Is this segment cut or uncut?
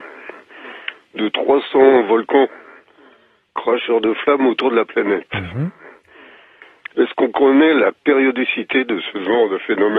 uncut